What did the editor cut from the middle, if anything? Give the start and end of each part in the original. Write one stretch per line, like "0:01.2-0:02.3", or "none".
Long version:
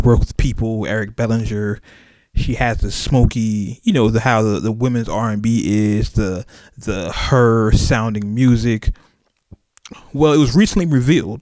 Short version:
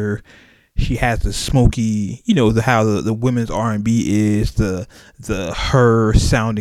none

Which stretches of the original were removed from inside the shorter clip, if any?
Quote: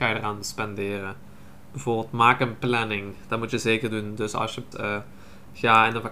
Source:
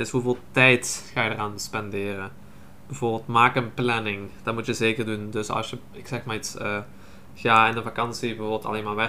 0:05.9-0:06.5

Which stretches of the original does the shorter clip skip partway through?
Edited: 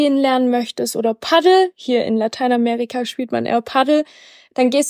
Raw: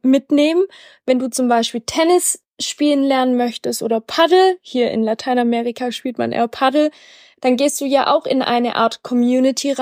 none

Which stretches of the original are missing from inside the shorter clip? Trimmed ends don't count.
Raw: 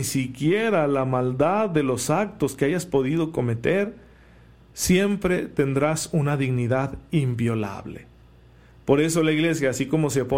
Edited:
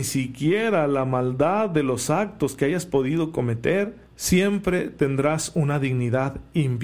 0:04.0-0:04.6

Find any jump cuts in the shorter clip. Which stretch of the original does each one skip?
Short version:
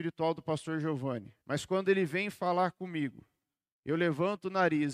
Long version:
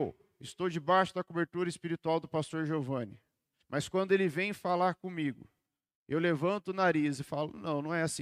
0:03.3-0:03.6

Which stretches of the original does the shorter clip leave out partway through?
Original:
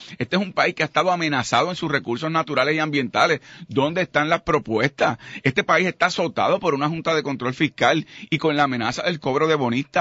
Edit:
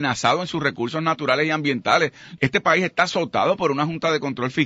0:03.7-0:05.4

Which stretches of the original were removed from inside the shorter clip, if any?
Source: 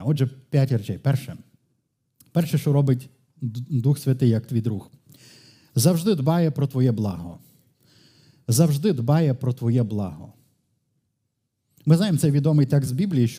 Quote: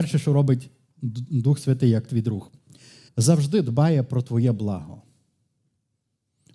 0:05.5-0:08.4

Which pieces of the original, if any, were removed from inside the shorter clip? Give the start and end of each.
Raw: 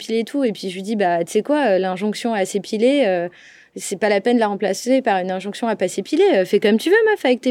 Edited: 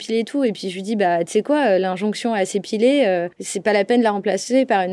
0:03.3-0:03.7

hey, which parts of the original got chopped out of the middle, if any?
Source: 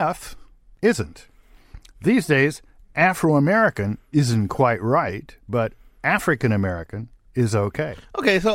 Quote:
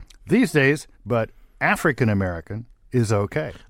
0:02.7-0:05.4

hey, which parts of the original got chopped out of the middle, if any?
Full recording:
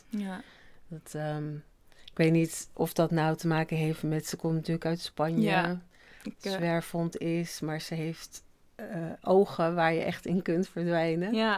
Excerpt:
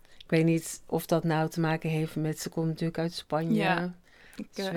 none

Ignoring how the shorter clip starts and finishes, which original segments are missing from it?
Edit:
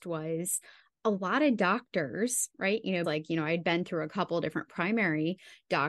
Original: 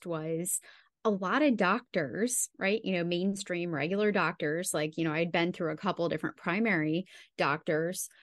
0:03.0-0:04.7

